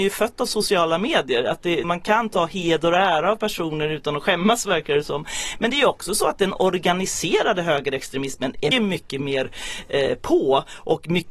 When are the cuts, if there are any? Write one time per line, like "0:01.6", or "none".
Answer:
0:01.8
0:08.7